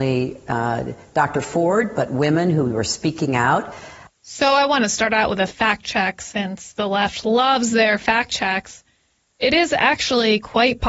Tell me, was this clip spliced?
no; 0 cuts

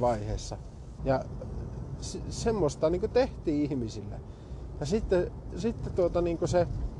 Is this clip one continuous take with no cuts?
no; 1 cut; at 1.0 s

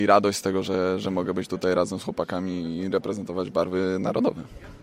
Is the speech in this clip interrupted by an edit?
no; 0 cuts

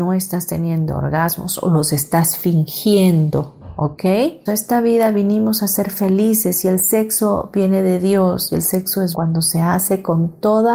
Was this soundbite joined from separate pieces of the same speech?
yes; 2 cuts; at 4.5 s, 9.1 s

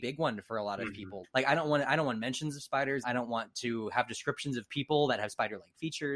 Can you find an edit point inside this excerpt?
yes; 2 cuts; at 1.2 s, 3.0 s

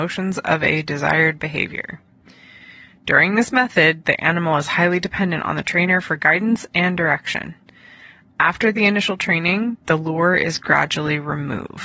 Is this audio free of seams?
yes; 0 cuts

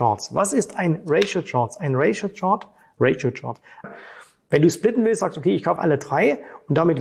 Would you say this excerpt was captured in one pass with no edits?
no; 2 cuts; at 3.8 s, 5.8 s

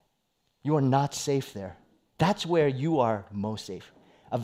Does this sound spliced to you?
yes; 1 cut; at 2.1 s

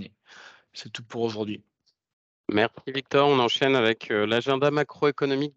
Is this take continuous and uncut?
yes; 0 cuts

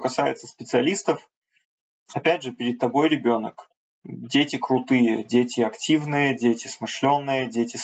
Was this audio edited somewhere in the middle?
no; 0 cuts

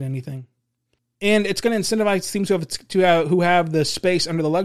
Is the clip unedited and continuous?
no; 1 cut; at 1.0 s

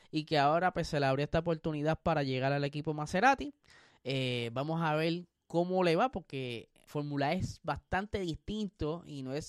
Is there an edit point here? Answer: yes; 1 cut; at 6.9 s

